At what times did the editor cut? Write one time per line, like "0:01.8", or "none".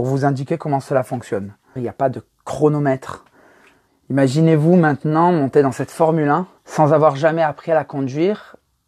0:01.8
0:03.9
0:06.6